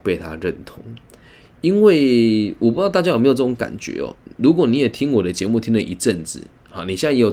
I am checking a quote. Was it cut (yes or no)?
no